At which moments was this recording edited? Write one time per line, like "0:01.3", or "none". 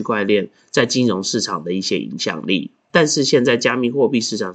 0:02.9